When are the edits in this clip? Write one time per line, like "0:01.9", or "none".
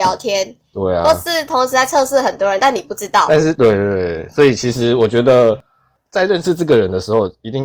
none

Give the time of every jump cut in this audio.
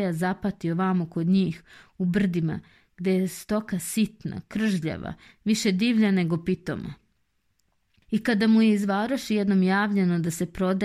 none

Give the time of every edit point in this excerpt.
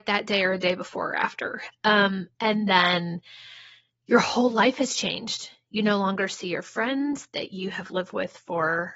none

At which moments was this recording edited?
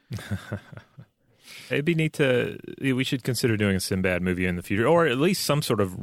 0:01.7

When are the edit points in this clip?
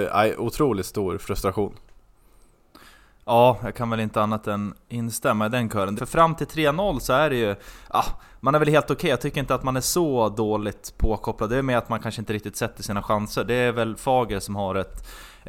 0:06.0

